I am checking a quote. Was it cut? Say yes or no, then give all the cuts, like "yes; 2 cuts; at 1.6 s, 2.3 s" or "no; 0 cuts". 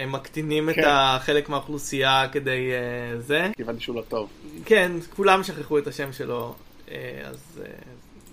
yes; 1 cut; at 3.5 s